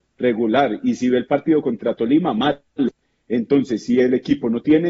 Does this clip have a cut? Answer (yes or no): no